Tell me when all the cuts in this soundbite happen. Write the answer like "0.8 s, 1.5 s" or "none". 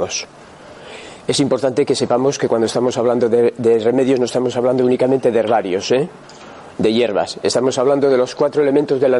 none